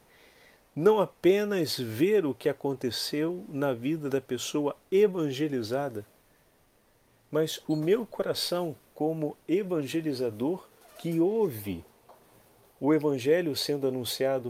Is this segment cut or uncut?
uncut